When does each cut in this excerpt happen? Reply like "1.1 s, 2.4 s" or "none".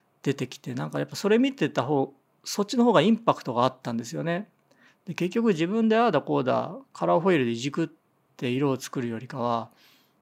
4.9 s